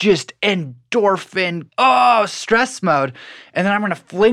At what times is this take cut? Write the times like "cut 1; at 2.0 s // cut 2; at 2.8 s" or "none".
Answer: cut 1; at 1.7 s